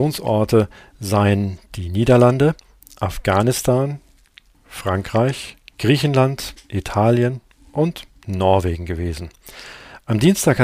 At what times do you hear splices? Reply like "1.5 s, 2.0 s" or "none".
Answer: 4.5 s, 5.7 s